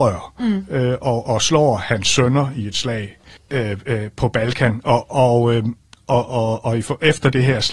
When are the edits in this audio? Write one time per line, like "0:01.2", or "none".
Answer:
0:03.4